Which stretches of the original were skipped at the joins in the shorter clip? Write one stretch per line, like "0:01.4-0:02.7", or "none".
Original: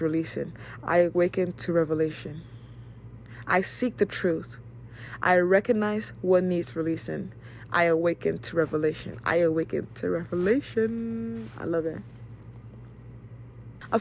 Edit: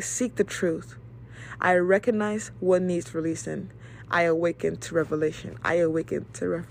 none